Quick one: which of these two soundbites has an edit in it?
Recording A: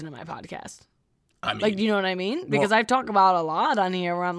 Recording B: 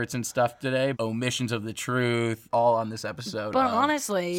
B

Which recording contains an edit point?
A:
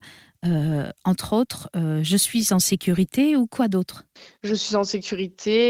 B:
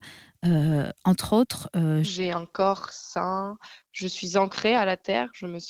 B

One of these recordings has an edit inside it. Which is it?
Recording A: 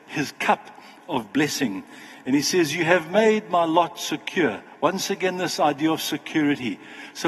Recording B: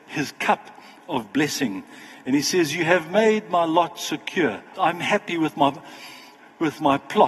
B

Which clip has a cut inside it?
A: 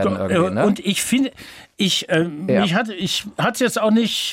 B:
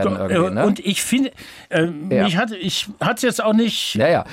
B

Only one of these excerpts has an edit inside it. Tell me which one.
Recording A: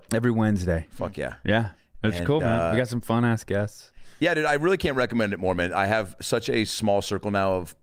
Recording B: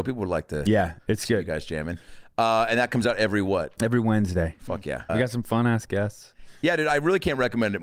B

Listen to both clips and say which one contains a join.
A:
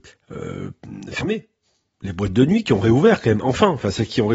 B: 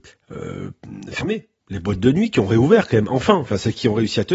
B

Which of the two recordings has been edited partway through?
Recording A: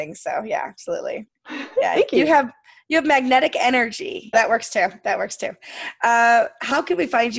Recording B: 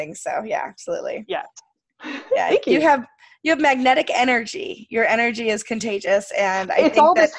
A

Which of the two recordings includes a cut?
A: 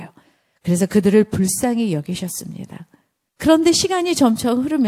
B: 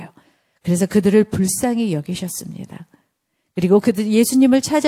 A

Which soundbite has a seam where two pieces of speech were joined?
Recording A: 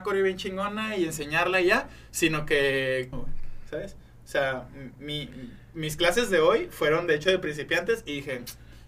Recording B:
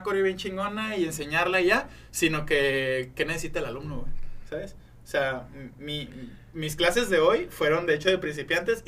A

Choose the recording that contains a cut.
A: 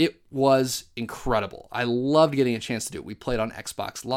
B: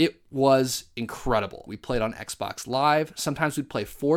B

